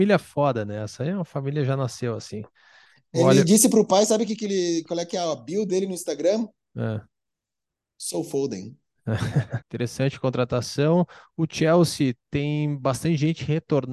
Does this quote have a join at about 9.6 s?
yes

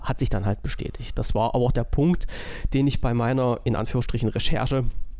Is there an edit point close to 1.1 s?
no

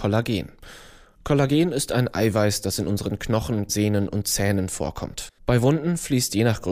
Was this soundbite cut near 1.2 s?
no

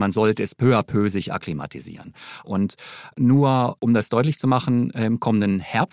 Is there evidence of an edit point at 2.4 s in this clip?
yes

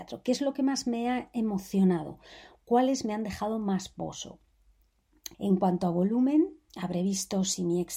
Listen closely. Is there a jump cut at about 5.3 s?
yes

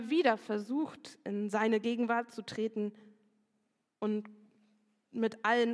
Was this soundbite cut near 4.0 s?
no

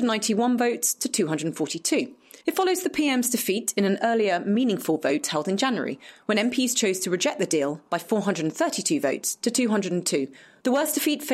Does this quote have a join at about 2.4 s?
yes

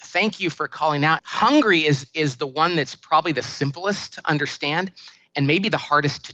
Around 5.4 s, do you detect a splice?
no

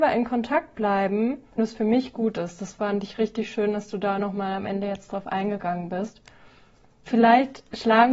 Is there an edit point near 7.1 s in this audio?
yes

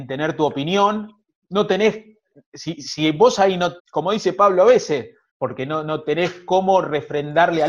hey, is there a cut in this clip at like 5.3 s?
yes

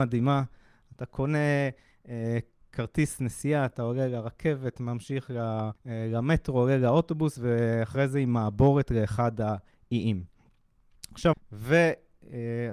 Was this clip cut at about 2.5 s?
no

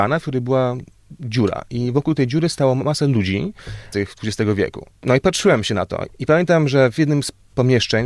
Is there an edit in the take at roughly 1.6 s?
no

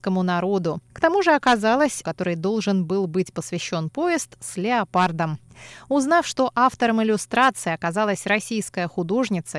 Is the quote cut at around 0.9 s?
yes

